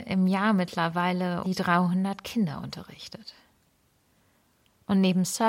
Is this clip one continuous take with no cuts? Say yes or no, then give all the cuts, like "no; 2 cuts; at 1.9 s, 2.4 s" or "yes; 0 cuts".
no; 1 cut; at 1.4 s